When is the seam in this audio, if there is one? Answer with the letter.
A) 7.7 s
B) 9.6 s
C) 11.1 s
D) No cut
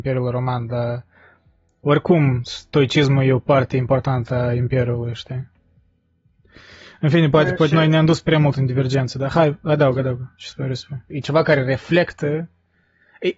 C